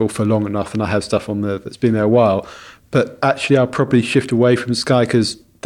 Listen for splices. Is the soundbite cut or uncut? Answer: uncut